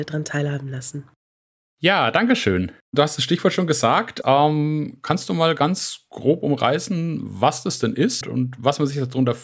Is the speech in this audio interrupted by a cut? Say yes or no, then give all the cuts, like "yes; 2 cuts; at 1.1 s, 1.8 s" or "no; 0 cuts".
yes; 2 cuts; at 4.2 s, 8.2 s